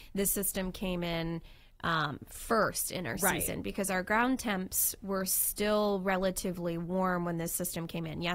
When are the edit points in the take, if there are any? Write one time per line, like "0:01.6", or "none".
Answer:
none